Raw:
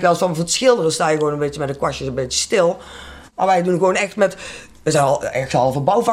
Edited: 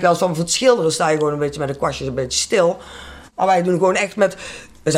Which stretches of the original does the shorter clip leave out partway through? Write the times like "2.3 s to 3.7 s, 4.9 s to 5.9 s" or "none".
none